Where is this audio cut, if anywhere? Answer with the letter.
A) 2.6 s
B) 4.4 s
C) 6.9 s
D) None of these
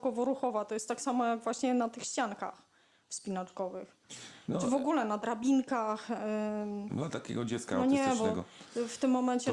C